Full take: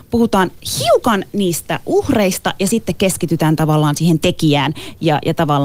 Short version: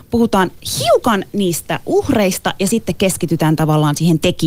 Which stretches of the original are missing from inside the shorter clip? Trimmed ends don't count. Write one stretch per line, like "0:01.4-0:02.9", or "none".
none